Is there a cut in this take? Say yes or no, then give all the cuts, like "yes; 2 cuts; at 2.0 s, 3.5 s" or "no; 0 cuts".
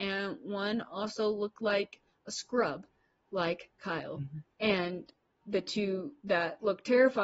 no; 0 cuts